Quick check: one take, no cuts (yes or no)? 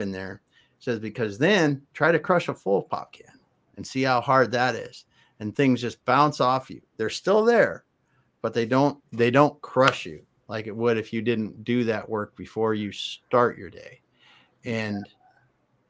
yes